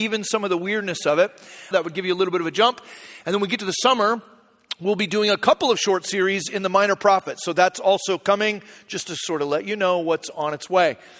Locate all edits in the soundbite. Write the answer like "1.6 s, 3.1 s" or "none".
1.7 s